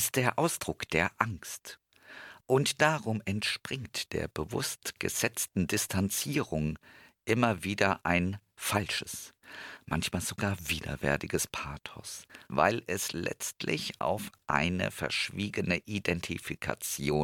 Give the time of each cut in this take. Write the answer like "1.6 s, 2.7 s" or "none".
12.5 s

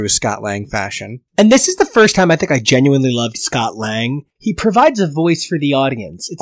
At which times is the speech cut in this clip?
4.4 s

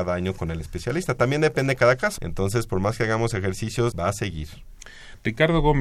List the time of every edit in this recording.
2.2 s, 3.9 s

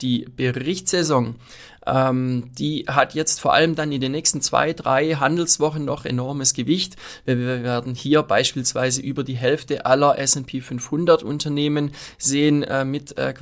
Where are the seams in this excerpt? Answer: none

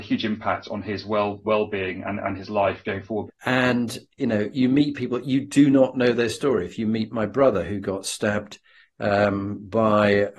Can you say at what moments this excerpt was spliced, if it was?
3.3 s

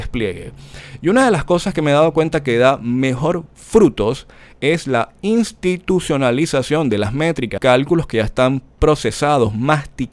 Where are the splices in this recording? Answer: 7.6 s

